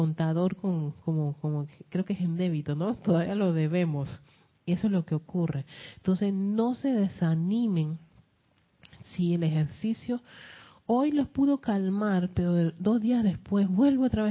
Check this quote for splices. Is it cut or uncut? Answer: uncut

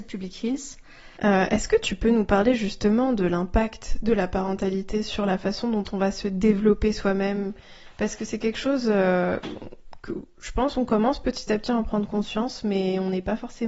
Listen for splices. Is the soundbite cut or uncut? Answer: cut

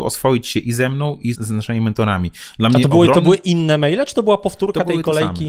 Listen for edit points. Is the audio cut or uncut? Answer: cut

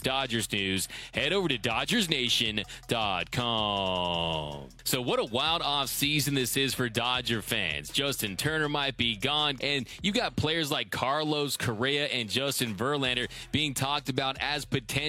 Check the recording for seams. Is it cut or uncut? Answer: cut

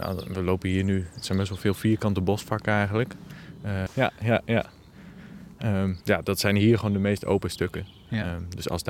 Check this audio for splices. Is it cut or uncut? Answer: cut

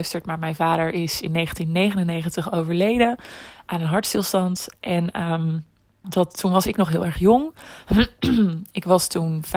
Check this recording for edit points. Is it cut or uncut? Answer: cut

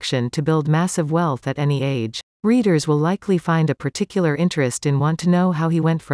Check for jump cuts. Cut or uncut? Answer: cut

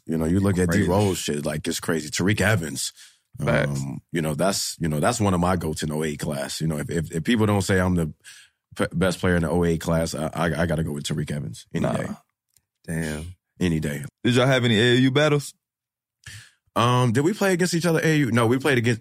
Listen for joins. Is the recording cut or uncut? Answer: cut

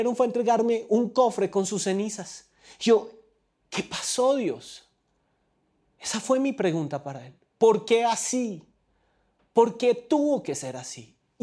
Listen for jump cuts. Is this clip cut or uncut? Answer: uncut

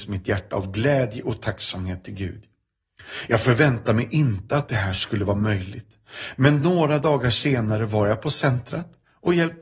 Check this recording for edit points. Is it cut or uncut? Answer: uncut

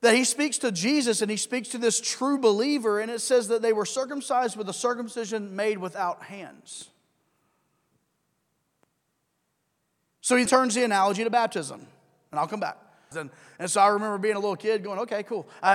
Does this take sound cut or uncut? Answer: cut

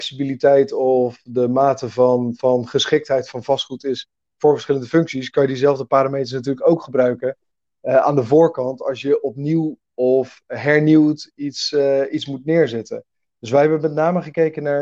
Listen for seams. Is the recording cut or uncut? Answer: uncut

